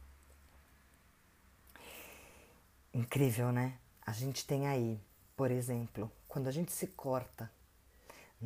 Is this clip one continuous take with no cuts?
yes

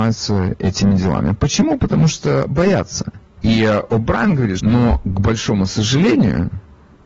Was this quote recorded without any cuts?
no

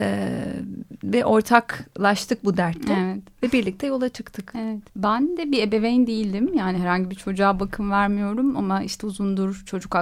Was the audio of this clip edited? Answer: yes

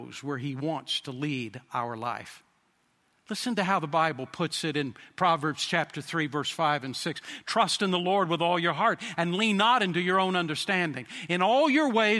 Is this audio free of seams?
yes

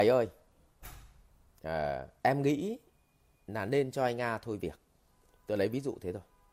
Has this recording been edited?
yes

